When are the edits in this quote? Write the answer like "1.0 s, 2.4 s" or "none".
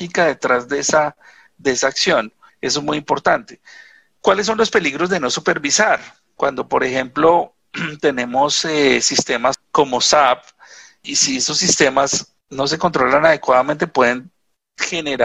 none